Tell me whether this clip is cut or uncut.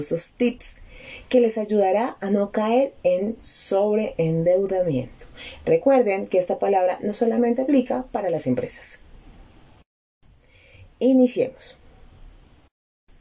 uncut